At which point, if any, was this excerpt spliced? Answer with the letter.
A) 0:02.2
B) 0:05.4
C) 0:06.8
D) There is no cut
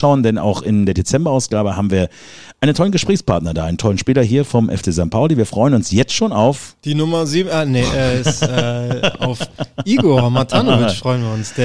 D